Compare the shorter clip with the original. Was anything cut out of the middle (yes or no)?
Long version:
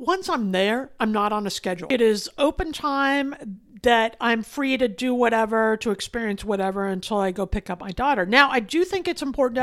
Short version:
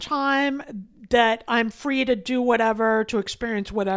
no